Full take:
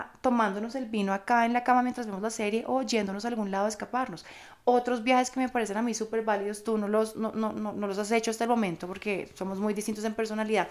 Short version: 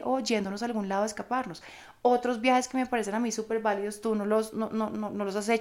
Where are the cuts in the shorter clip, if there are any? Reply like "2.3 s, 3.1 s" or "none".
none